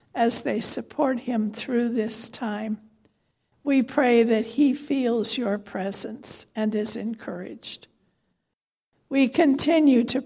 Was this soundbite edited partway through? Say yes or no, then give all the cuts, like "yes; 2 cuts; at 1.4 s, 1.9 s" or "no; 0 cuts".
no; 0 cuts